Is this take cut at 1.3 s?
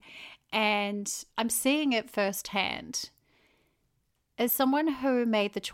yes; 1 cut; at 1.3 s

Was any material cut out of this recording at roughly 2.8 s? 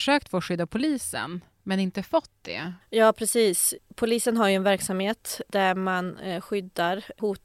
yes; 1 cut; at 2.8 s

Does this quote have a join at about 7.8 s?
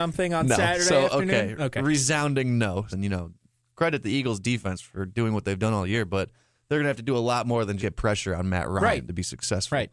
yes; 2 cuts; at 2.9 s, 7.8 s

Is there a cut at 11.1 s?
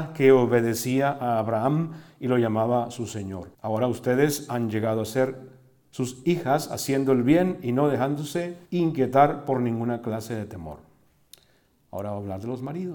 no; 2 cuts; at 3.5 s, 8.7 s

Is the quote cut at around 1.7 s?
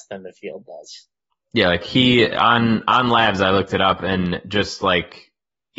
no; 0 cuts

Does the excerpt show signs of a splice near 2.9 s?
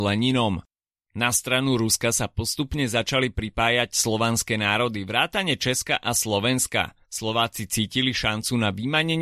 no; 2 cuts; at 0.9 s, 7.0 s

